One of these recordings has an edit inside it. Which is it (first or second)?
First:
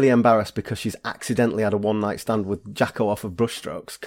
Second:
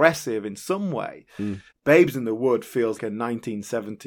second